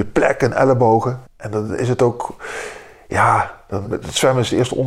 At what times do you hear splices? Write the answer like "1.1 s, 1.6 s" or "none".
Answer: 1.2 s, 3.8 s